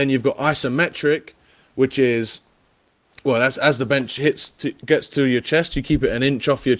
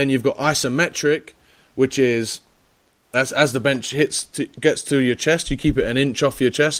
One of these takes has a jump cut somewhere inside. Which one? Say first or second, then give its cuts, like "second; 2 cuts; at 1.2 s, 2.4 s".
second; 1 cut; at 3.1 s